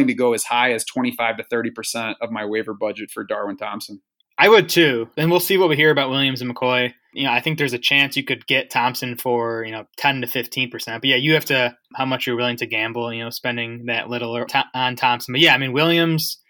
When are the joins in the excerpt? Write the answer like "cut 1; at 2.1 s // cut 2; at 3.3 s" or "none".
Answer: cut 1; at 11.9 s // cut 2; at 14.5 s